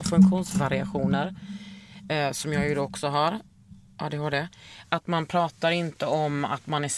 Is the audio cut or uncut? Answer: uncut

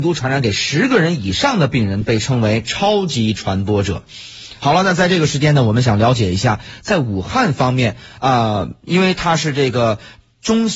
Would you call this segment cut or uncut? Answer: uncut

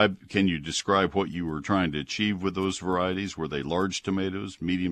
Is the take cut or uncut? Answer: uncut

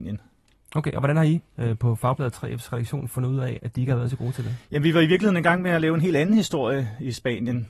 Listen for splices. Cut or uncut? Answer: cut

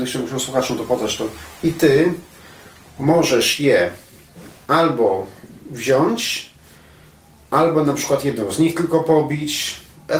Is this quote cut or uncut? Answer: uncut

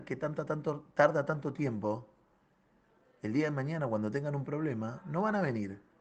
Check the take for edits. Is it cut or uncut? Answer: uncut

